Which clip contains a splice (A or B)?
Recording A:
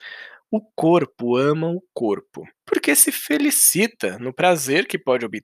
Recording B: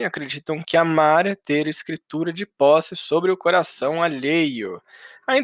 A